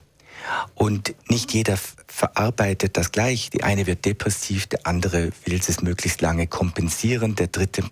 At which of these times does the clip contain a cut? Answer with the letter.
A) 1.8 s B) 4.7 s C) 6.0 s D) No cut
D